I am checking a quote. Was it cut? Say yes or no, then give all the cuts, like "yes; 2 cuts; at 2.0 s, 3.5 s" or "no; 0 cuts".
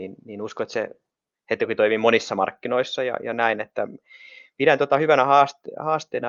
no; 0 cuts